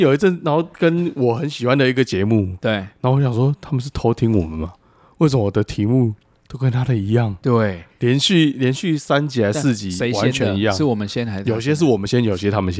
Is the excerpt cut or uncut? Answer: uncut